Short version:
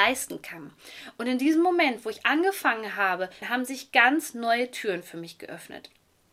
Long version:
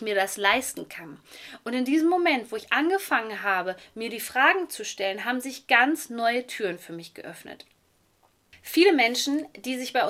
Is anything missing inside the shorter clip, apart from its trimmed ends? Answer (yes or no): yes